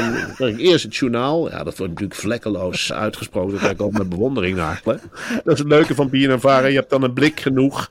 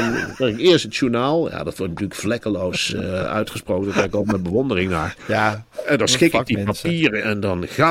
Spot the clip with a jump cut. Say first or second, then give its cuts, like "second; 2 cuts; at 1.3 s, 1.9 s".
first; 2 cuts; at 2.9 s, 4.9 s